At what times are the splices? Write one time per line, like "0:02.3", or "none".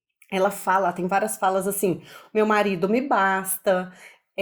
none